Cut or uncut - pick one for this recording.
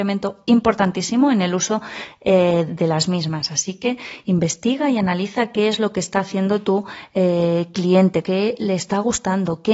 cut